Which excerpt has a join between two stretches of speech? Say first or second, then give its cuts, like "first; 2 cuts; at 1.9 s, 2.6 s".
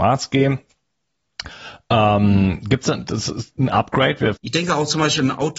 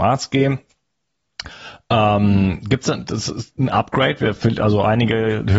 first; 1 cut; at 4.4 s